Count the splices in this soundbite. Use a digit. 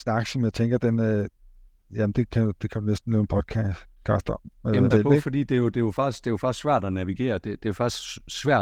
1